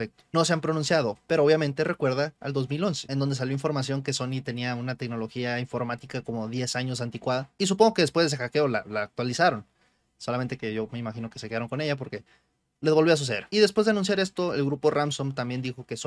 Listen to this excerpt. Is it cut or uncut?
uncut